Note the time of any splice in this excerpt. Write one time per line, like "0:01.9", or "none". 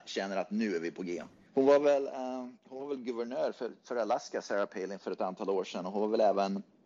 0:01.5